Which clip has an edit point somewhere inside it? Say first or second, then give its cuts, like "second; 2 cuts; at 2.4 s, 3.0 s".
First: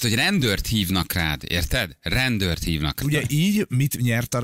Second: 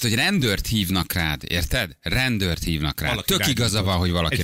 first; 1 cut; at 3.0 s